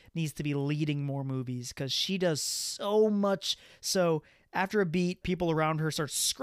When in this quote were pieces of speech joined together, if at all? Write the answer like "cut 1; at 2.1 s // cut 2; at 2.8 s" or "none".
cut 1; at 3.7 s // cut 2; at 5.2 s